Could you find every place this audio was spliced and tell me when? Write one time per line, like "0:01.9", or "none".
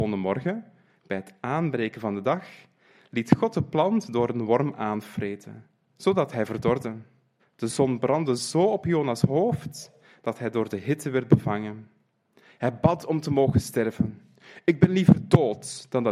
0:07.4